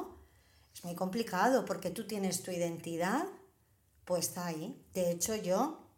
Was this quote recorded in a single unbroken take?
yes; 0 cuts

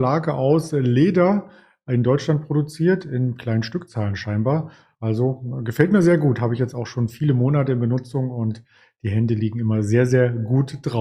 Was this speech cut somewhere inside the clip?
no; 0 cuts

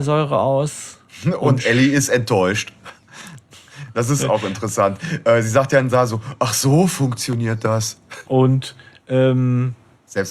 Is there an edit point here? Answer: yes; 1 cut; at 8.2 s

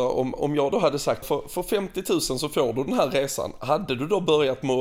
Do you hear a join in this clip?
yes; 1 cut; at 1.2 s

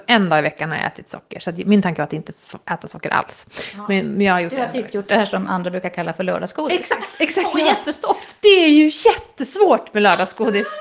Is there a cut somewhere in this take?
no; 0 cuts

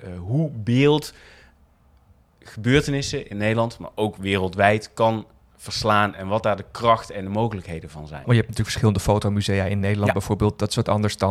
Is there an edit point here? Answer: yes; 1 cut; at 8.2 s

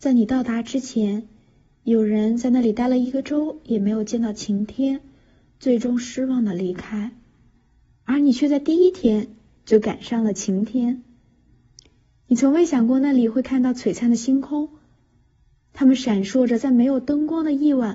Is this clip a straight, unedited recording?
no; 1 cut; at 16.5 s

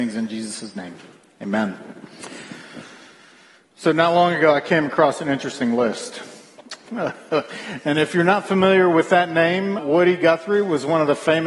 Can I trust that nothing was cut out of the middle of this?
no; 2 cuts; at 6.9 s, 9.8 s

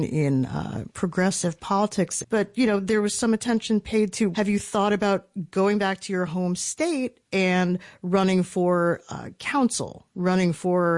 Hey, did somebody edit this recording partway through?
yes; 2 cuts; at 2.2 s, 4.3 s

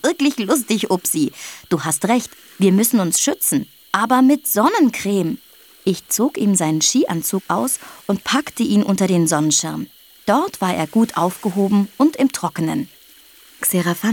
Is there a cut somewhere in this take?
no; 0 cuts

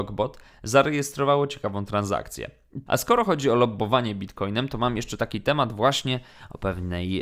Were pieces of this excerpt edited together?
yes; 1 cut; at 2.9 s

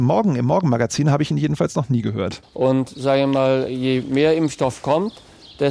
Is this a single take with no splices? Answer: no; 1 cut; at 2.4 s

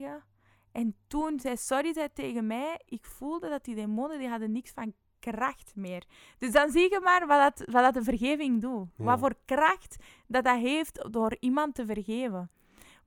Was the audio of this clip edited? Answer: no; 0 cuts

